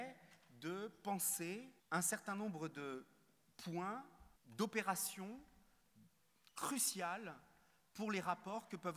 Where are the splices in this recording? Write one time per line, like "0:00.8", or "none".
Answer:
0:01.8
0:04.4